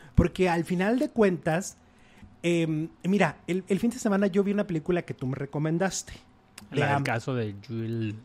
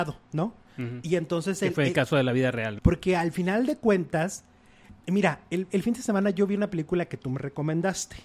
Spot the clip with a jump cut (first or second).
second